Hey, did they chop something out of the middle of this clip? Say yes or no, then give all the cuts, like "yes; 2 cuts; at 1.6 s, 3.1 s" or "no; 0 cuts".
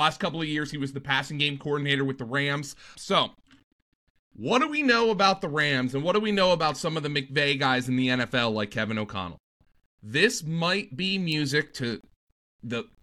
yes; 1 cut; at 2.9 s